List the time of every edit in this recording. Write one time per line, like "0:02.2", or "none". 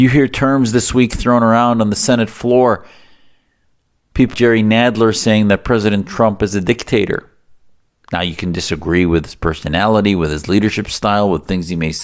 0:04.3